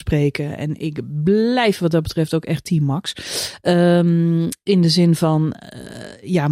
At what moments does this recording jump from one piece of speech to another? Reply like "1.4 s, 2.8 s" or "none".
none